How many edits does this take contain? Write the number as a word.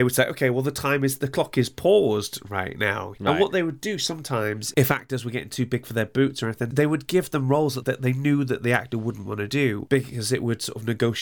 one